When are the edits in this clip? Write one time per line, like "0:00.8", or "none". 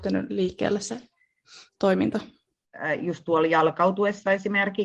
none